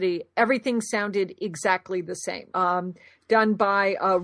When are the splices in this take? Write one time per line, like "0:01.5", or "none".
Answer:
0:02.5